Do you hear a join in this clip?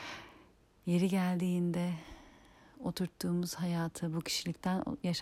no; 0 cuts

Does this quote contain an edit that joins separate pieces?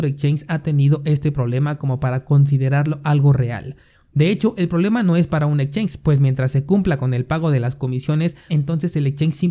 yes; 1 cut; at 8.5 s

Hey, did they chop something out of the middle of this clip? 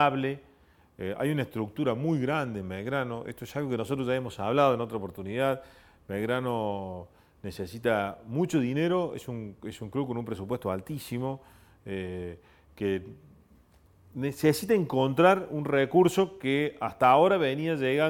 no; 0 cuts

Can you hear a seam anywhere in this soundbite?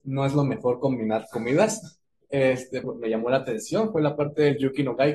yes; 1 cut; at 2.8 s

